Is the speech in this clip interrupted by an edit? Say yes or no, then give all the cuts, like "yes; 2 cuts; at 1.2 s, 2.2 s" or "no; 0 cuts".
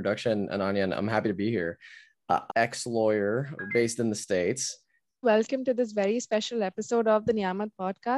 yes; 2 cuts; at 2.5 s, 5.2 s